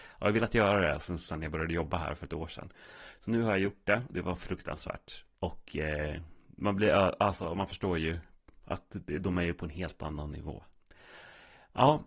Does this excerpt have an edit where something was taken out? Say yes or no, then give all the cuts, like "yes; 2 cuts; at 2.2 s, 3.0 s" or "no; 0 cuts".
yes; 1 cut; at 5.3 s